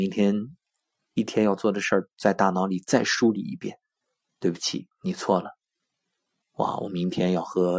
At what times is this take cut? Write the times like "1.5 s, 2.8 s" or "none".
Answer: 6.4 s